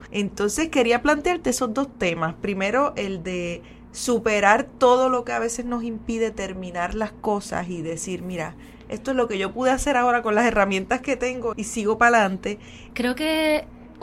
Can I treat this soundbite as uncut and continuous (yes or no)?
no